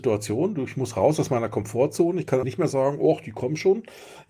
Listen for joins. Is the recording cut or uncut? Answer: cut